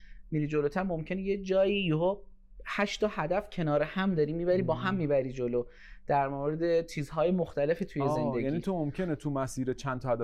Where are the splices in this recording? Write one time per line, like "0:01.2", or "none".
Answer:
none